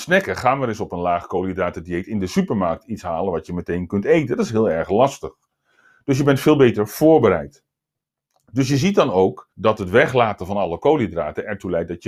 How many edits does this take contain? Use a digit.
1